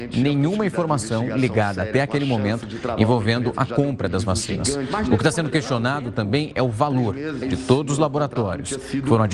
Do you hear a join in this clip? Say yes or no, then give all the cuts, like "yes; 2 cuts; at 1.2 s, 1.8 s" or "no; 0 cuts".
yes; 1 cut; at 7.4 s